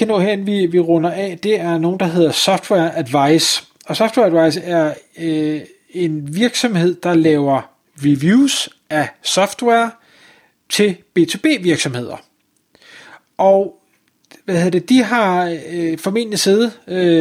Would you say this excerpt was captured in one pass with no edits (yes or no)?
yes